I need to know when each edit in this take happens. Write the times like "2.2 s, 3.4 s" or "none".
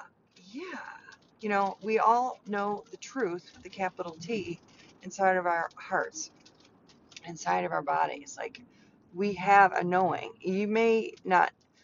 1.3 s